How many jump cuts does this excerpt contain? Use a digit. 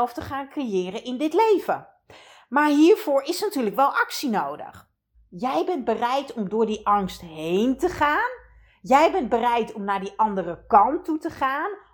1